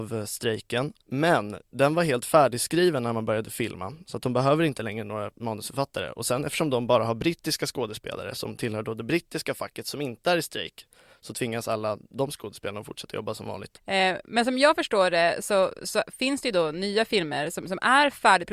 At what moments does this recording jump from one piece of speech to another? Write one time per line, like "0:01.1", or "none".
0:01.0